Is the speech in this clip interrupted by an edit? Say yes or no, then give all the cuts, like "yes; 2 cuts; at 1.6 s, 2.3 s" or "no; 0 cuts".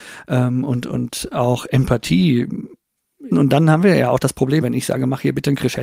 yes; 2 cuts; at 3.3 s, 4.6 s